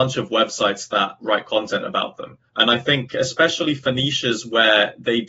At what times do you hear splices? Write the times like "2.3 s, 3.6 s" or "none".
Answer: 2.5 s